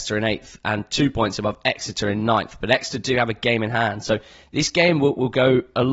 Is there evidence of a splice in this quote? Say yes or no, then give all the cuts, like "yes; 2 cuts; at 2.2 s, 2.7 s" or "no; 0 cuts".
no; 0 cuts